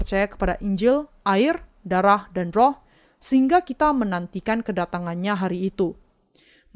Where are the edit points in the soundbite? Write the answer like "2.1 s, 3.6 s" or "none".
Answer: none